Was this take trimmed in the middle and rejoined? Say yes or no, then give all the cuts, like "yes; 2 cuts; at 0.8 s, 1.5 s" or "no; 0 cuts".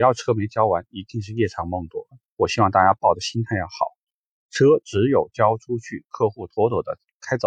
no; 0 cuts